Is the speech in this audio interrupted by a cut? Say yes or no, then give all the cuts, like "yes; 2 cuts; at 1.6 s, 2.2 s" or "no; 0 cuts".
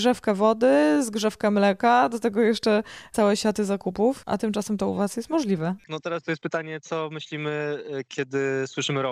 no; 0 cuts